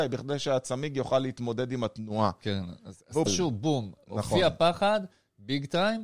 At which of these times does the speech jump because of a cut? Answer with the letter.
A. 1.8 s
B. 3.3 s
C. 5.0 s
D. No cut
B